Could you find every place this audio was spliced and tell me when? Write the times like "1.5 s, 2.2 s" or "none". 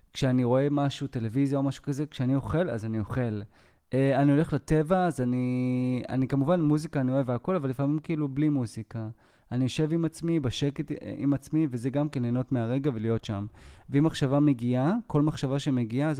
none